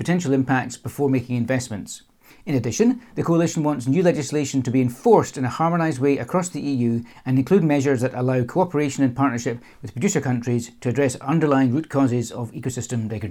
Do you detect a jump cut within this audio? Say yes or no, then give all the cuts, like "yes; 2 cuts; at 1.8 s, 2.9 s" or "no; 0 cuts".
no; 0 cuts